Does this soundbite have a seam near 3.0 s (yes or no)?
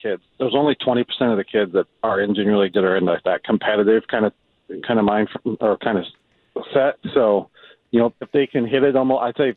no